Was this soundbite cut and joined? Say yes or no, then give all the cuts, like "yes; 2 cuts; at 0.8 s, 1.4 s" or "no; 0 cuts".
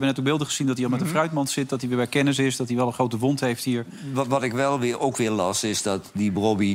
no; 0 cuts